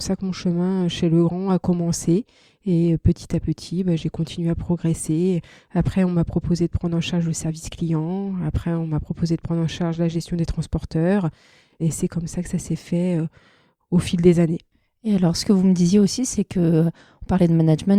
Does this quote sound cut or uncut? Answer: uncut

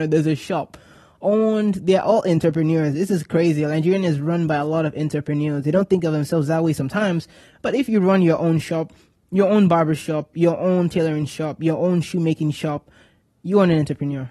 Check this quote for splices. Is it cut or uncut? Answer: uncut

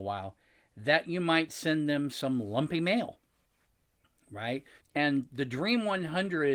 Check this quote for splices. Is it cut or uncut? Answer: cut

